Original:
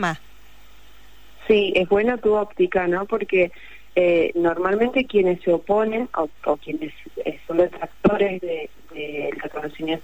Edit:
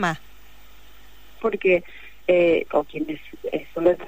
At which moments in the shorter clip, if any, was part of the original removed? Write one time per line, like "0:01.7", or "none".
0:01.4
0:02.7